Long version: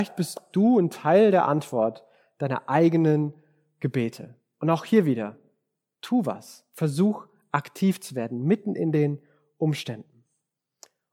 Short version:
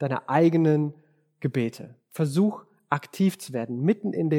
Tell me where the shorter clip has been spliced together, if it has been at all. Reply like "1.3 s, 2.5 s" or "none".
2.1 s